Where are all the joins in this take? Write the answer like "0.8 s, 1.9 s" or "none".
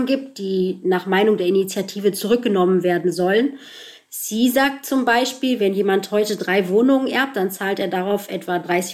none